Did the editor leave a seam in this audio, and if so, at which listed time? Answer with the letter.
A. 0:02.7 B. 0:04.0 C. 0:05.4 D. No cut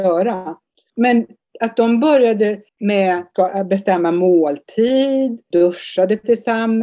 A